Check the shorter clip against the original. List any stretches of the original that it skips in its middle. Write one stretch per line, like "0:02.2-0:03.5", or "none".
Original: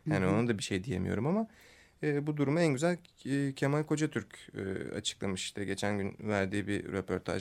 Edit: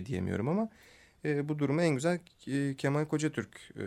none